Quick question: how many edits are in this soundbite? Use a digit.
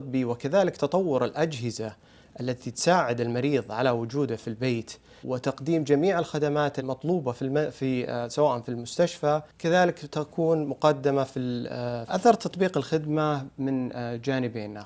2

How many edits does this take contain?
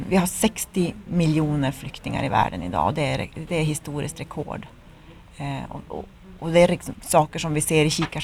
1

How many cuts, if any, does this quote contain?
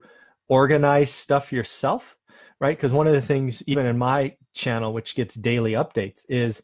0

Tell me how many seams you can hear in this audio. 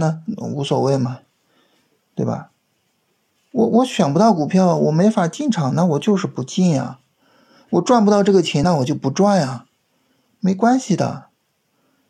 0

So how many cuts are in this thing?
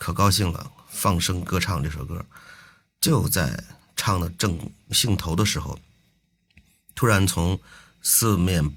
1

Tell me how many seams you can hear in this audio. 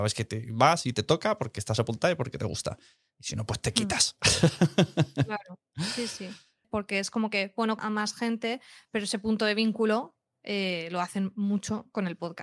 2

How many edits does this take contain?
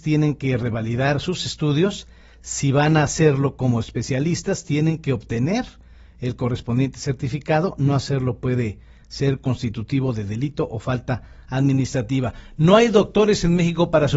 0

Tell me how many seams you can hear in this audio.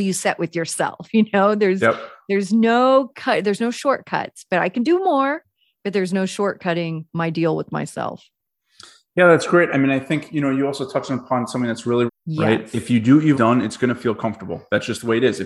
2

